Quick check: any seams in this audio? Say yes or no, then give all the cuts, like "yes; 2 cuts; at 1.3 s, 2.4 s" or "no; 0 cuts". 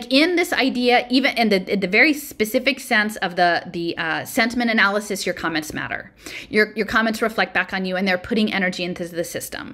no; 0 cuts